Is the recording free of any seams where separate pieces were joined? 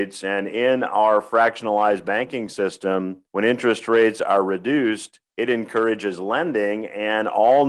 no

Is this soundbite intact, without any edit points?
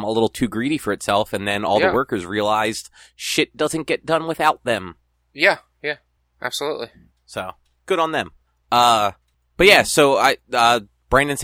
yes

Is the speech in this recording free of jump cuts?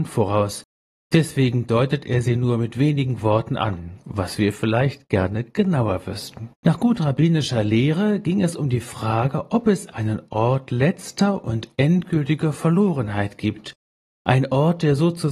no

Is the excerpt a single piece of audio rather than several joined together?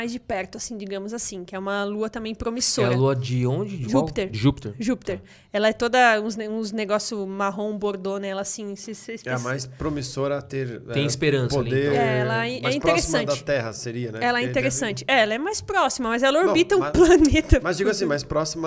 yes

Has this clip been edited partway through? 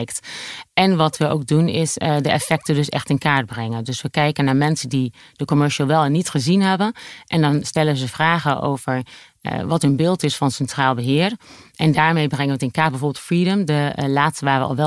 no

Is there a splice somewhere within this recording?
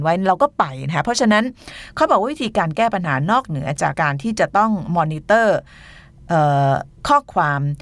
yes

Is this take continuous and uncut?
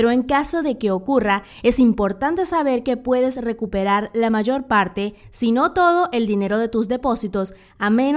yes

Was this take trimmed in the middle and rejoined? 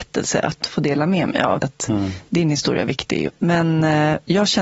yes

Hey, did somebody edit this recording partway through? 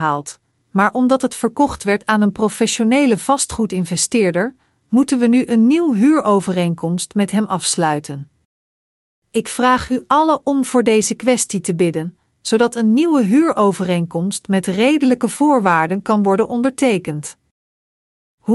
no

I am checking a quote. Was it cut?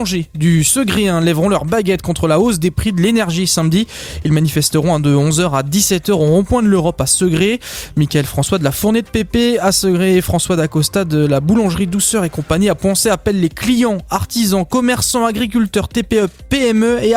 no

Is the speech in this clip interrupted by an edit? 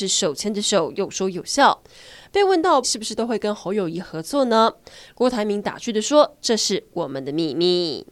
yes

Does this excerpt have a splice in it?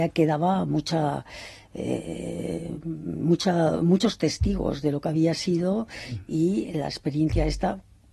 no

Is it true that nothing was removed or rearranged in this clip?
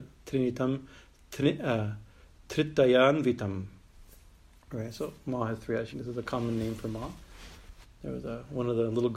no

